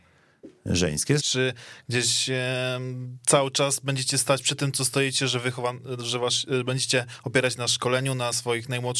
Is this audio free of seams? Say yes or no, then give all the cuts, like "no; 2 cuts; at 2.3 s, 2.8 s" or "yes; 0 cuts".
no; 1 cut; at 1.2 s